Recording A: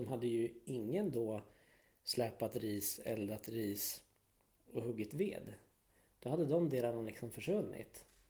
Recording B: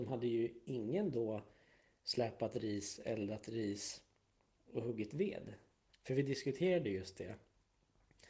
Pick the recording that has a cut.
B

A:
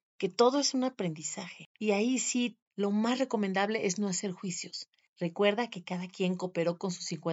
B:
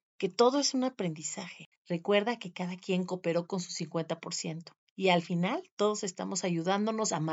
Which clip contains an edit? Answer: B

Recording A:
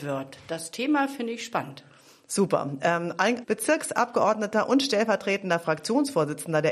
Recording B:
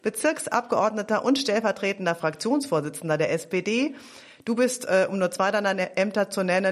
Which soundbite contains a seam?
A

